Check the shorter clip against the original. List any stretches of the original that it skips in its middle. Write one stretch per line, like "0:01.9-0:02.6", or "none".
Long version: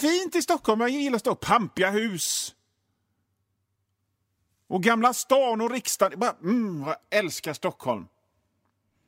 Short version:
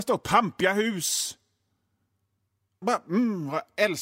0:04.0-0:06.2